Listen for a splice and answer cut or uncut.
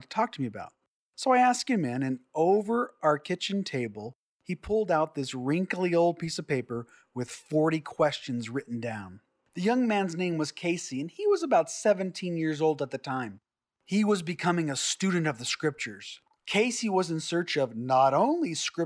uncut